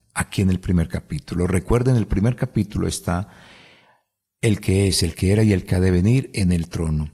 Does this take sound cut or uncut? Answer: uncut